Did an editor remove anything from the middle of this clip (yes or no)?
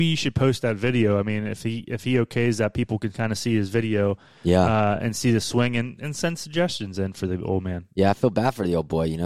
no